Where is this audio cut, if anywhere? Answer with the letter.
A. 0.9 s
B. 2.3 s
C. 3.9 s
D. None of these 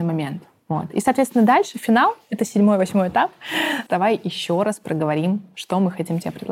C